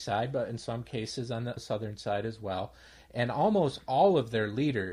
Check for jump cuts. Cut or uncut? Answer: uncut